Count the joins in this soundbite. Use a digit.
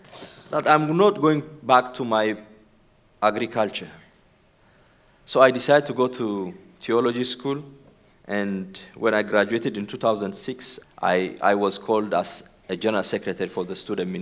2